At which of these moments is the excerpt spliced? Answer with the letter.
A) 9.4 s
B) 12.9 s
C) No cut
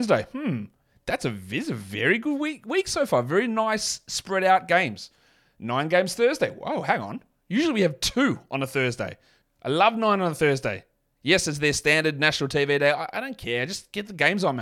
A